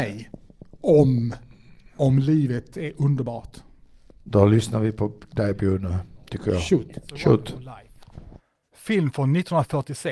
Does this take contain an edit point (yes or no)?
no